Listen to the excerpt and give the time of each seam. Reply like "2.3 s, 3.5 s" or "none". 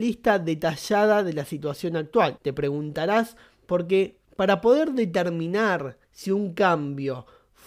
2.4 s, 4.2 s, 6.0 s